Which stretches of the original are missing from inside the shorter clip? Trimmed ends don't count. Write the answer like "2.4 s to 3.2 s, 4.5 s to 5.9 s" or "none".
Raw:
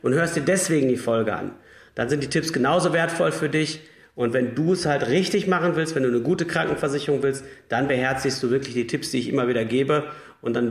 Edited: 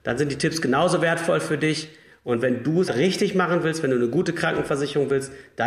4.8 s to 5.0 s